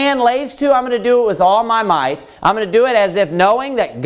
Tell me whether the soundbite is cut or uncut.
uncut